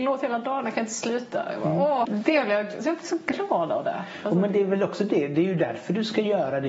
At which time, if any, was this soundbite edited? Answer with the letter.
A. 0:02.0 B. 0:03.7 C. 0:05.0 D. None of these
A